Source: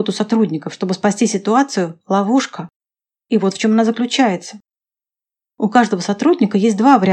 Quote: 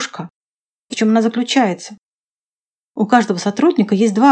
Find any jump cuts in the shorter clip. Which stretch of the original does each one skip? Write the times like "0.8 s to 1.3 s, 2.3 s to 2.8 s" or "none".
3.3 s to 3.5 s